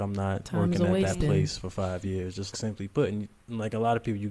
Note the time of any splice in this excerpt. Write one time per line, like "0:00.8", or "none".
0:02.5

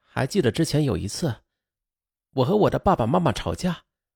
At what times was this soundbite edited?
none

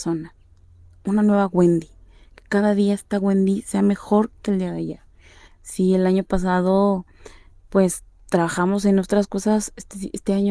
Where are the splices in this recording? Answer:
0:05.5

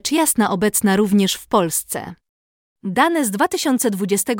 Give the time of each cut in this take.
0:02.7

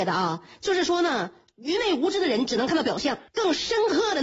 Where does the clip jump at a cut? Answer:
0:03.3

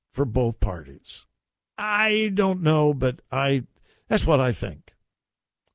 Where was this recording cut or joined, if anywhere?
0:01.7
0:04.2

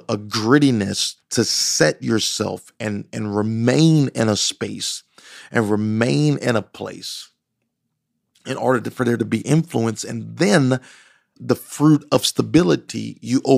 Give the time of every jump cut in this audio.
0:01.2
0:11.3

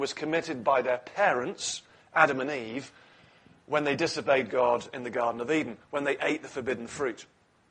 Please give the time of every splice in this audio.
none

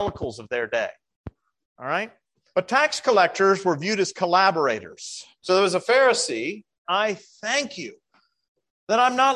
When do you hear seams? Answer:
0:02.5
0:05.4
0:06.8

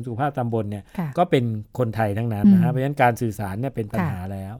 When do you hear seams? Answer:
0:02.4

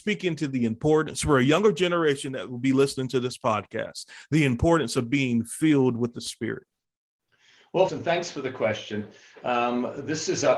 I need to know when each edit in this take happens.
0:07.9

